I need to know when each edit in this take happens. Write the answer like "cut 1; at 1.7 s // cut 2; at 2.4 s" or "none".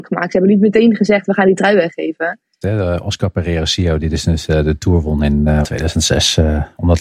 cut 1; at 2.6 s // cut 2; at 5.6 s